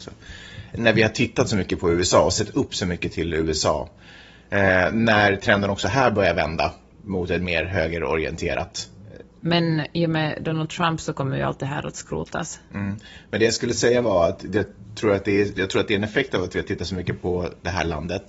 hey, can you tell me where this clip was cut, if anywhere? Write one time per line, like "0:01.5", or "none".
0:09.4
0:15.6